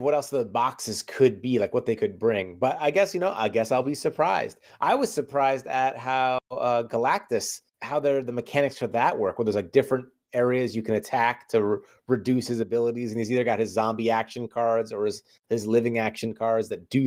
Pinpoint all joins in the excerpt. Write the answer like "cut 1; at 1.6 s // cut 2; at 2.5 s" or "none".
none